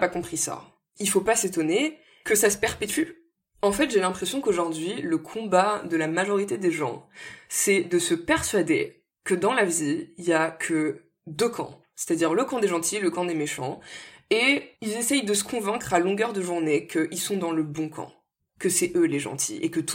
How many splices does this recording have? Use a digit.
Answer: 0